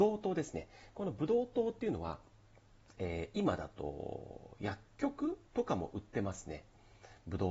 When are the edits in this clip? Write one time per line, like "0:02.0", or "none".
0:05.5